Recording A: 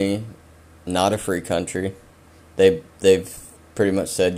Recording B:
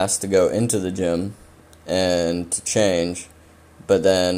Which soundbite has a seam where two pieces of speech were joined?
A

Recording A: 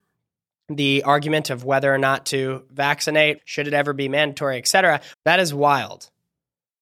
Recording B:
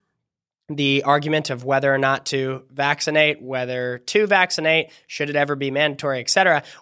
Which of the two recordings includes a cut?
A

